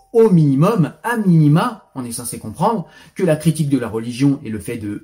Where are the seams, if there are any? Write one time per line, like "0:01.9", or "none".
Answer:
none